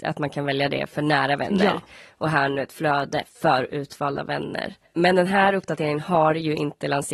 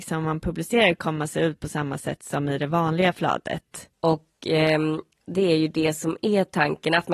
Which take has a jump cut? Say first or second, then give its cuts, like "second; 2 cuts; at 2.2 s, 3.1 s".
second; 1 cut; at 3.9 s